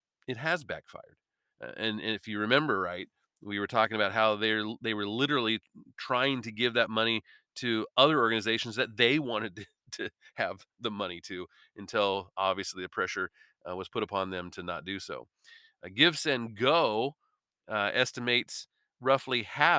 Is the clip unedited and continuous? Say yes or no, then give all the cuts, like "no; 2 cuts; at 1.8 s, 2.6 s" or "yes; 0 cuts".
no; 1 cut; at 1.5 s